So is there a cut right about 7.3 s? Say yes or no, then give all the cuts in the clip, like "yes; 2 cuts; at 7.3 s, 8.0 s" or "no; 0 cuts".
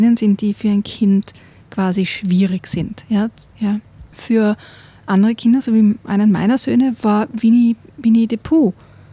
no; 1 cut; at 3.5 s